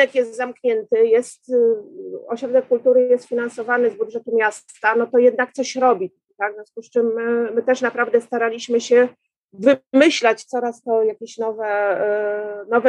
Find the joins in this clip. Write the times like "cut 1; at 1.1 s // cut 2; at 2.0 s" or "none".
none